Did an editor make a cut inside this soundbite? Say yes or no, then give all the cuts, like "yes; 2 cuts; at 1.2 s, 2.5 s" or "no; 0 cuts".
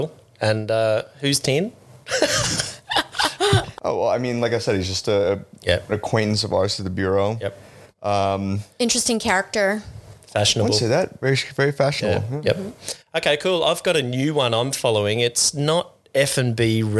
no; 0 cuts